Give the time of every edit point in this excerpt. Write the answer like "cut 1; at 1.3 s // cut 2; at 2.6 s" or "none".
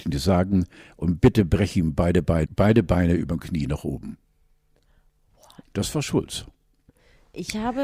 cut 1; at 2.5 s // cut 2; at 5.7 s